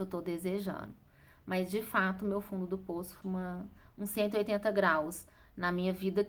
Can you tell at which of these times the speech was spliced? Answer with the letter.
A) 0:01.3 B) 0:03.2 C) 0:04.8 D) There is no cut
B